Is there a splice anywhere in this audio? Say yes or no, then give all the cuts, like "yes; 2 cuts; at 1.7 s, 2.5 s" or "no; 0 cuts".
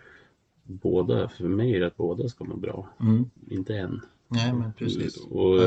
yes; 1 cut; at 3.4 s